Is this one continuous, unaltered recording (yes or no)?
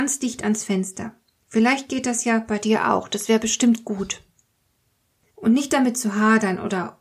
no